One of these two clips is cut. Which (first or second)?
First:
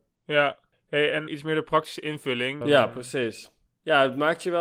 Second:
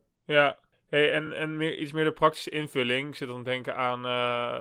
first